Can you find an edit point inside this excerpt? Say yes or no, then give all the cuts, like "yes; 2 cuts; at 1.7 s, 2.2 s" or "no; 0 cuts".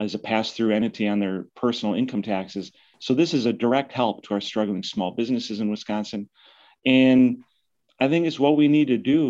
no; 0 cuts